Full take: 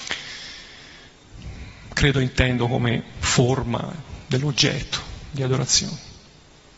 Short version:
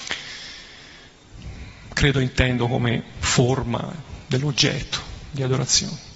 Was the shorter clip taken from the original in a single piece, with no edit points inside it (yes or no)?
yes